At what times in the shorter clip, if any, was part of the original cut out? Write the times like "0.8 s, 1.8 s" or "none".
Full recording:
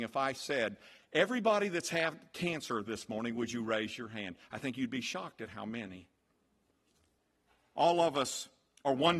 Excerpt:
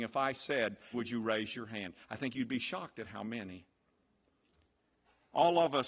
0.9 s